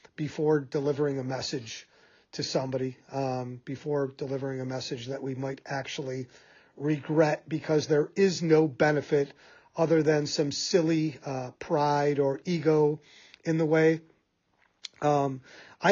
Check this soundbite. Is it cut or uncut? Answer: uncut